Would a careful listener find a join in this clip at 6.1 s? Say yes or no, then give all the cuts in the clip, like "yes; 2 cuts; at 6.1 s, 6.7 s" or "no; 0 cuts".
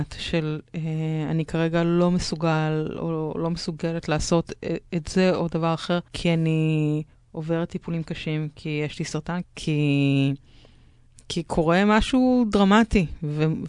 yes; 2 cuts; at 6.1 s, 9.4 s